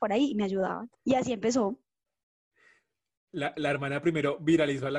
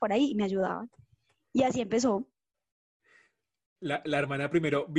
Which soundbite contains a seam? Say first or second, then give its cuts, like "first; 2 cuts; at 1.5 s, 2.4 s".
first; 1 cut; at 0.9 s